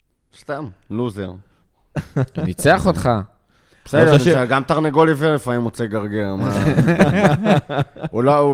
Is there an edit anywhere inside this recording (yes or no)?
no